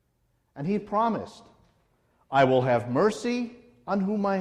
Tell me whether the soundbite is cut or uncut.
uncut